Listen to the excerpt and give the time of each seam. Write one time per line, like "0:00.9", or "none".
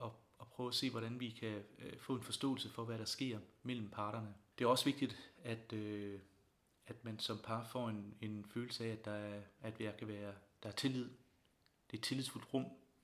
0:04.5